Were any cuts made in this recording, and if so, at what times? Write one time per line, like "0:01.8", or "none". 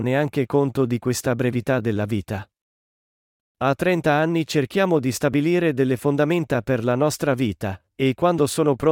0:03.4